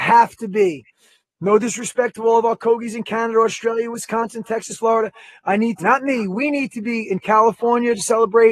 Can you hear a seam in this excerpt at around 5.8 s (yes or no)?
yes